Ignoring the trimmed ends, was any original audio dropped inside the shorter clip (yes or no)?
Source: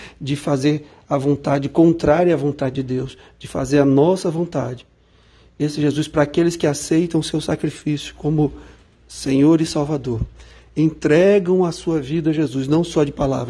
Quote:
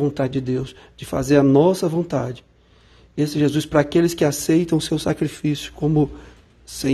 no